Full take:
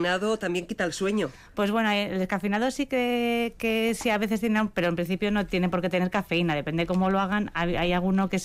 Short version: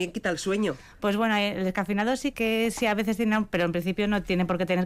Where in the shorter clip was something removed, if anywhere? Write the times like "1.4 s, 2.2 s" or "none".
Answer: 2.3 s